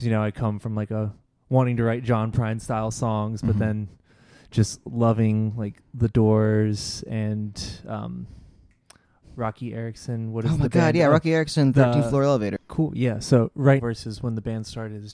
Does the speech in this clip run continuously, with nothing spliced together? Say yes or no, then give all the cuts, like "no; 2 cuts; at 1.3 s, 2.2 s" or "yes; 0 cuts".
no; 2 cuts; at 12.6 s, 13.8 s